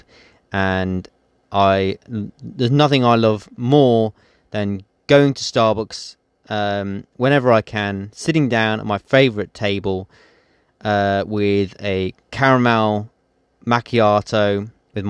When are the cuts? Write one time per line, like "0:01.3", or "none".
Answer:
none

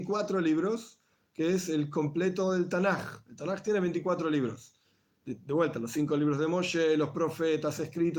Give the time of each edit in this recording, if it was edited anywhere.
none

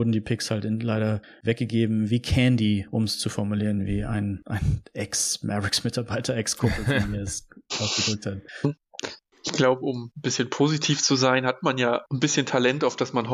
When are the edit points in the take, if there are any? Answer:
0:09.3

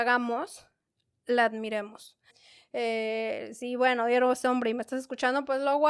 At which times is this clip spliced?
0:02.3

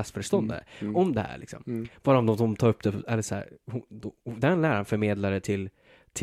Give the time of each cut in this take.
none

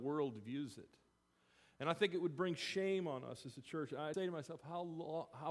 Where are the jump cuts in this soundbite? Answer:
0:04.1

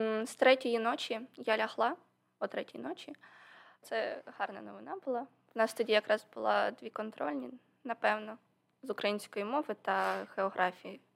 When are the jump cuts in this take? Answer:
0:03.8

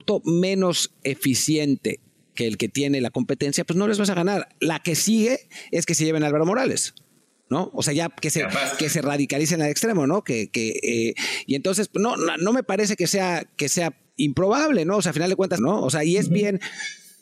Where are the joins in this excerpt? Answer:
0:14.1
0:15.6

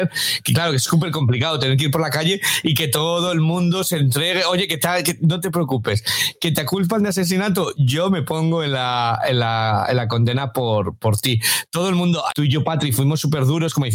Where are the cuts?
0:12.3

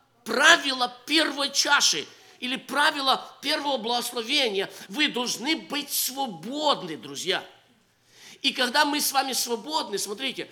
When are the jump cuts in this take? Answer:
0:04.9

